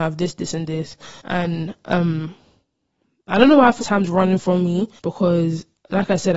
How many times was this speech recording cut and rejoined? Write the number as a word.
three